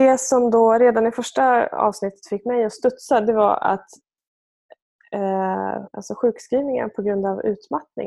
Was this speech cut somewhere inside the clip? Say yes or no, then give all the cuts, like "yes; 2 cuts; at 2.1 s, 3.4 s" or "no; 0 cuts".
yes; 1 cut; at 5.9 s